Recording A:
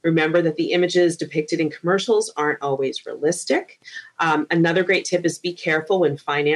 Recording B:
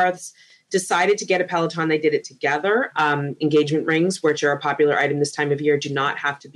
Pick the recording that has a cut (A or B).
B